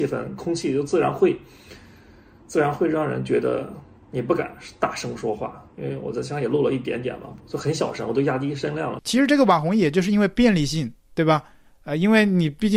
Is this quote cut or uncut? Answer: cut